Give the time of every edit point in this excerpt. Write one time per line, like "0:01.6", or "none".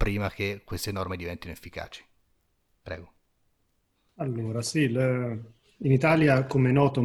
none